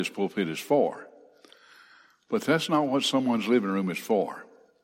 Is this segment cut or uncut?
uncut